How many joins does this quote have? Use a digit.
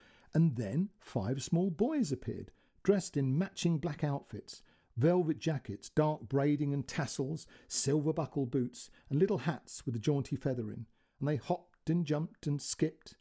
0